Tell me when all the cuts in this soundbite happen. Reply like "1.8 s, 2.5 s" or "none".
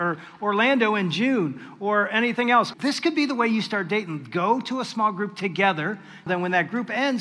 2.7 s, 6.3 s